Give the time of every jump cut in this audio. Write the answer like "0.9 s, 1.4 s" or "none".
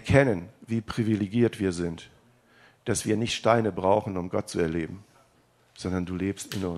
none